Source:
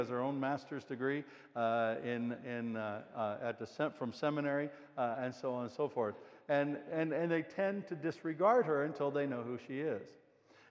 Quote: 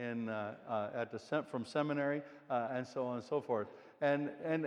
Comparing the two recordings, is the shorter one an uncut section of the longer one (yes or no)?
yes